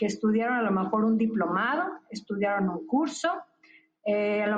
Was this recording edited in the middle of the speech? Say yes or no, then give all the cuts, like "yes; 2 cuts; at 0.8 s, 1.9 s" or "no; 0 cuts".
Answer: no; 0 cuts